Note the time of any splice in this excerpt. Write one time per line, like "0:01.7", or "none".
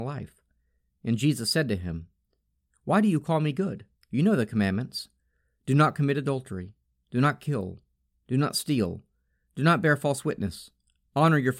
0:04.0